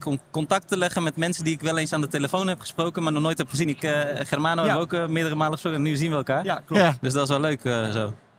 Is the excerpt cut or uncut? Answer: uncut